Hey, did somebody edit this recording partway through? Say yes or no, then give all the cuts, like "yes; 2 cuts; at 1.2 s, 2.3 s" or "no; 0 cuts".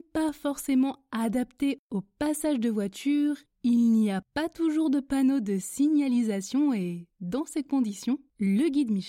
no; 0 cuts